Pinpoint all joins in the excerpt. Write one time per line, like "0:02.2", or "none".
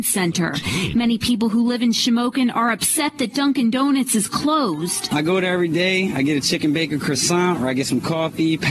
none

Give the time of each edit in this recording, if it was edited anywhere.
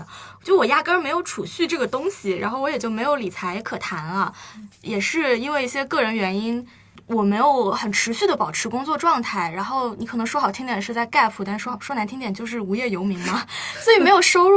none

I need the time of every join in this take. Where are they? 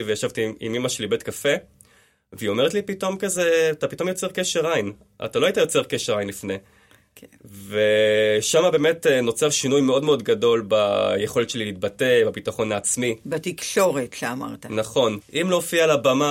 0:15.2

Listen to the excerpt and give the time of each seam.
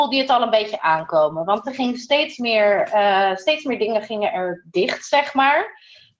none

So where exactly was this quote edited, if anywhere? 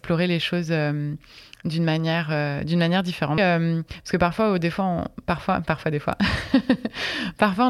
0:03.4

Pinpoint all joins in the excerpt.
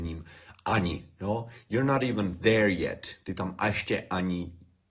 none

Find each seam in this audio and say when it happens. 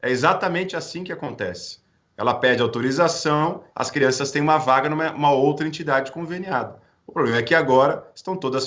0:03.7

